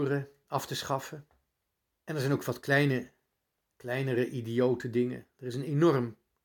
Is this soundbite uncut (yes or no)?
no